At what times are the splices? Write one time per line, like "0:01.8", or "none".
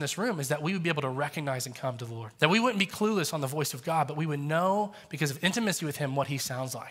0:02.3